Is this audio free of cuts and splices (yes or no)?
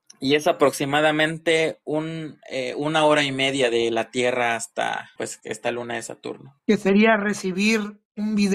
no